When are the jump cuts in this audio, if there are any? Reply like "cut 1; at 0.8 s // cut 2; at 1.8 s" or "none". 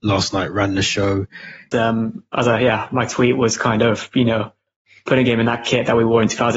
cut 1; at 1.7 s